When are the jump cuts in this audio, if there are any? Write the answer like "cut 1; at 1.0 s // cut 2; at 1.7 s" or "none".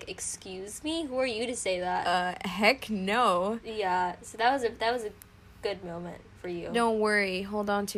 none